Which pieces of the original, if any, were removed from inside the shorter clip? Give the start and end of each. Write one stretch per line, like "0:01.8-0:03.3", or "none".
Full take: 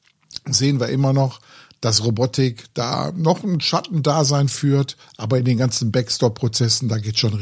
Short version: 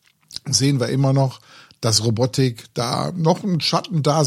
none